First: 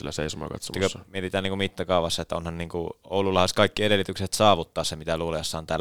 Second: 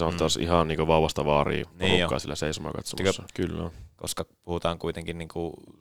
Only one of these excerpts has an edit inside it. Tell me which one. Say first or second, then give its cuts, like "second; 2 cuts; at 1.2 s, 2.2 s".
second; 1 cut; at 3.3 s